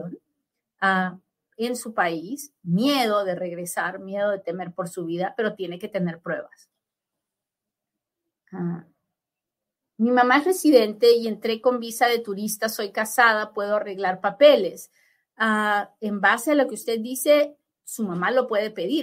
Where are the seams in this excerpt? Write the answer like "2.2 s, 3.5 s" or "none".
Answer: none